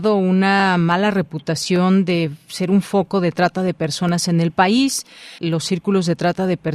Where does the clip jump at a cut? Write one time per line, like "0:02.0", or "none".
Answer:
0:05.4